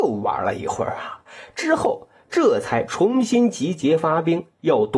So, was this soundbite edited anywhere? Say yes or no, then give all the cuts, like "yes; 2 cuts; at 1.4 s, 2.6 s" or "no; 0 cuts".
no; 0 cuts